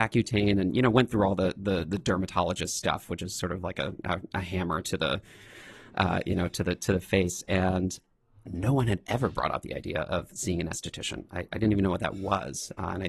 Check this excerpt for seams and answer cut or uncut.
uncut